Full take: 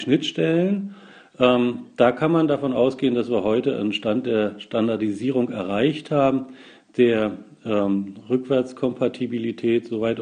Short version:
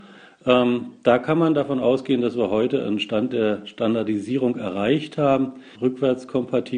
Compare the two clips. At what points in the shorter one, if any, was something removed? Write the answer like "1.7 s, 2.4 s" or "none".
5.7 s

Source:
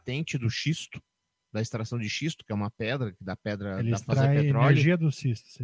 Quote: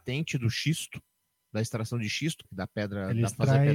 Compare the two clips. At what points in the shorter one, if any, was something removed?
2.4 s

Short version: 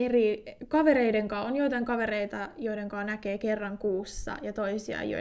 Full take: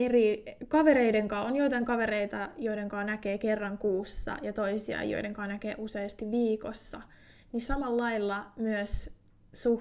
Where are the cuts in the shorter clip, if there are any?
none

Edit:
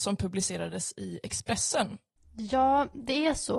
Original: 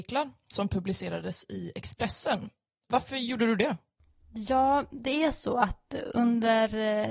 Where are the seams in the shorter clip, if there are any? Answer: 2.2 s

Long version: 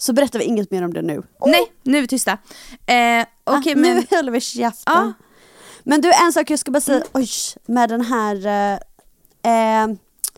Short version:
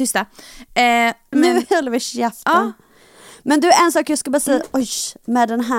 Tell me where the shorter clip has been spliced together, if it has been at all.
1.3 s

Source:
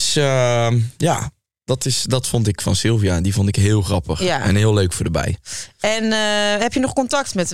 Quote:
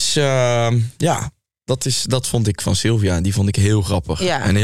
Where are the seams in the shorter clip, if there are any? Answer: none

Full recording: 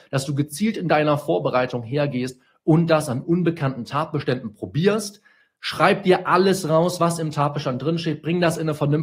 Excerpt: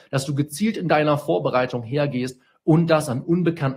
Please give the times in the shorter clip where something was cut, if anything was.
none

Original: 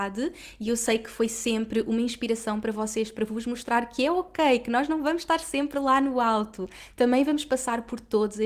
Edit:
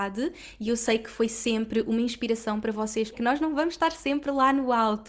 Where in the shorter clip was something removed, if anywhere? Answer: 3.1 s

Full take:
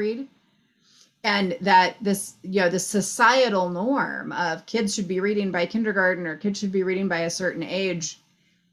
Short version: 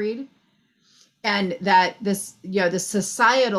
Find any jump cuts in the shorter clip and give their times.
none

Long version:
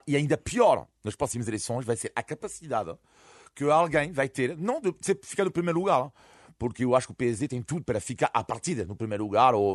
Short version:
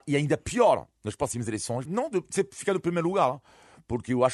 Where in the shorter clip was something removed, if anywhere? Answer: 1.9 s

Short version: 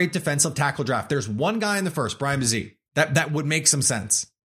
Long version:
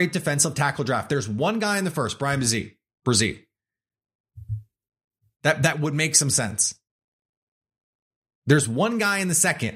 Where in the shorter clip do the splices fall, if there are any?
2.9 s

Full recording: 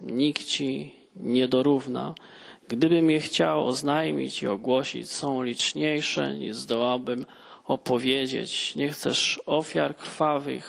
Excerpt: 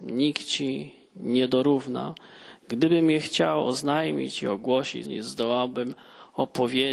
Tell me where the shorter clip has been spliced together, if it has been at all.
5.0 s

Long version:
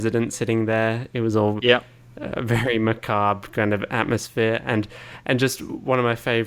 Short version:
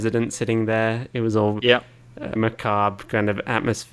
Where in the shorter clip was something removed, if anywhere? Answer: 2.4 s

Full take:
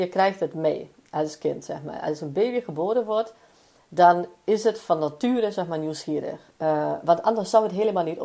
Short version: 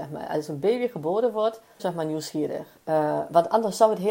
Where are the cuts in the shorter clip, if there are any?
1.8 s

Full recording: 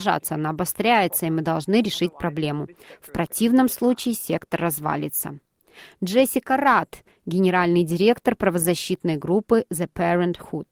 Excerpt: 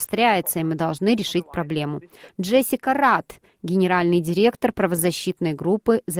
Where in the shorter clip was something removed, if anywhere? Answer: 2.3 s

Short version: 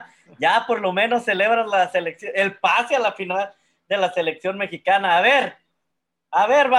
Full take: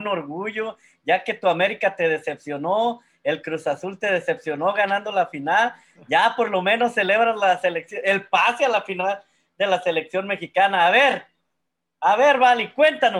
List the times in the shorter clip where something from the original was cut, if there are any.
none

